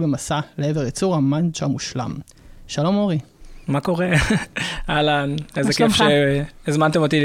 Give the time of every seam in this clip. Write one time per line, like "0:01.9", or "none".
none